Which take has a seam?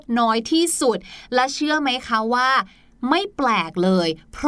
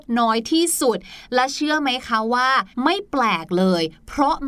second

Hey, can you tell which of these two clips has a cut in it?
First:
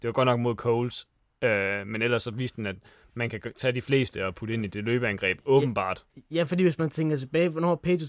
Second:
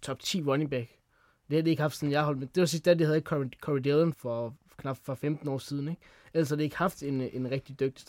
second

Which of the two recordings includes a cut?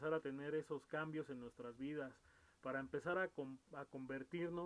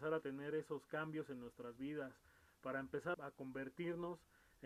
second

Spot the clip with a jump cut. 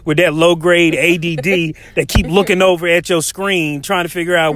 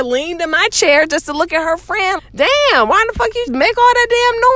second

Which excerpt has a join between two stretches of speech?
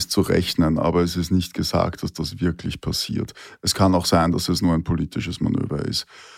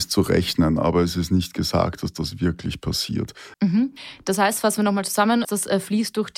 second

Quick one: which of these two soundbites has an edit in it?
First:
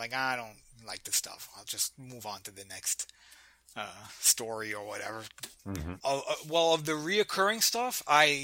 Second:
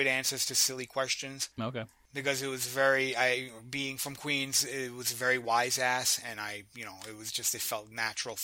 first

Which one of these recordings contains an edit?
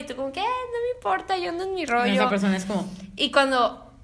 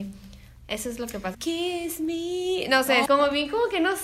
second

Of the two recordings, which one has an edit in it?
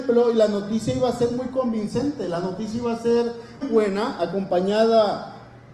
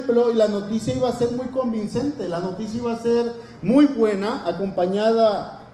first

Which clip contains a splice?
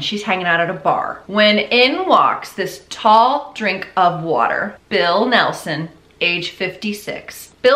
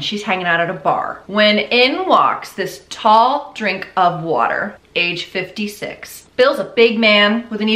second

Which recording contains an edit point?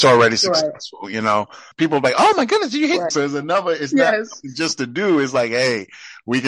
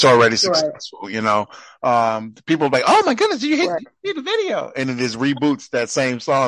first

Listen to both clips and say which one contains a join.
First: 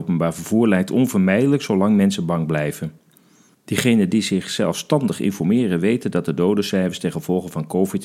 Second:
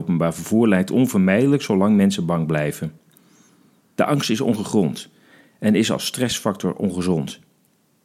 first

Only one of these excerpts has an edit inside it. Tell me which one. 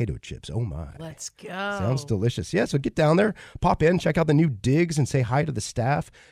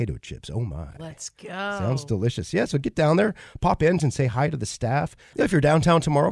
second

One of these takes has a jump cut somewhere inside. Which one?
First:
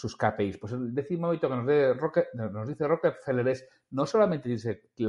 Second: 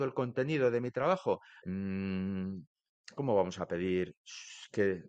second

